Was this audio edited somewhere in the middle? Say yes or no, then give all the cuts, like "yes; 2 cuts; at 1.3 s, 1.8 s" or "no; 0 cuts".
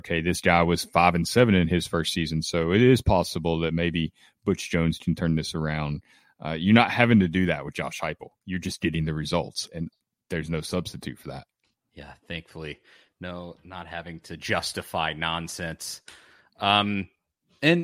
no; 0 cuts